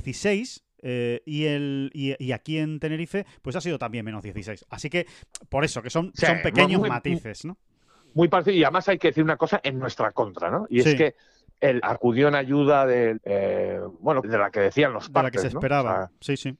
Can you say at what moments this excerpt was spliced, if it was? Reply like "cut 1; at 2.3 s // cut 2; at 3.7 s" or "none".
cut 1; at 11.8 s // cut 2; at 13.2 s // cut 3; at 14.2 s